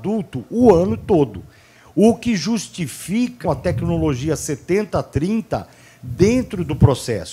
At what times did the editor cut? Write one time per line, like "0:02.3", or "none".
0:03.4